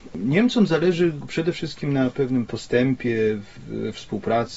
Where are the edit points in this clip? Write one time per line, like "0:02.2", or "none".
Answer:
none